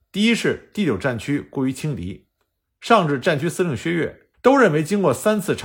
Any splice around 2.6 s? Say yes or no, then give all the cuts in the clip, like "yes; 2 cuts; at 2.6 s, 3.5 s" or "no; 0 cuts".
no; 1 cut; at 4.3 s